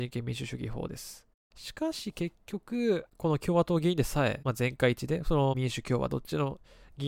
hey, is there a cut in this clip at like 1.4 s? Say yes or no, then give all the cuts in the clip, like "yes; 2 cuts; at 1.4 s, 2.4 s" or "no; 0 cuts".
yes; 1 cut; at 1.4 s